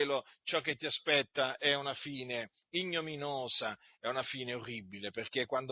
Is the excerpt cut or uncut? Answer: uncut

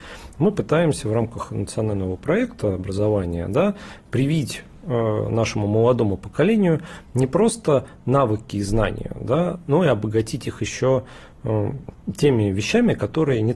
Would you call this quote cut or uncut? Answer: uncut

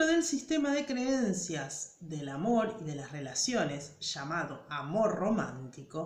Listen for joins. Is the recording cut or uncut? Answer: uncut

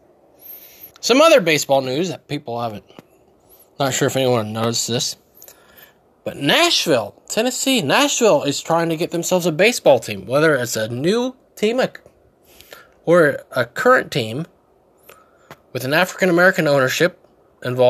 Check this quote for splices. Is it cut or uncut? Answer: cut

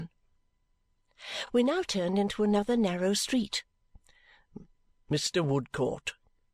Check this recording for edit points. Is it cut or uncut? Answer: uncut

